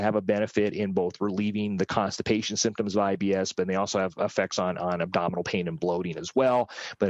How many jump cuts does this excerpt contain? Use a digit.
0